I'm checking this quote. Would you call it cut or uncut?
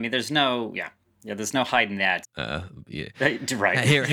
cut